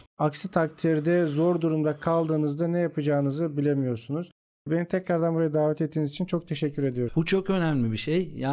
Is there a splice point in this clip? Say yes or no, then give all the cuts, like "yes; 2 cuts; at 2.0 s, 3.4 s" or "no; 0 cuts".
yes; 1 cut; at 7.1 s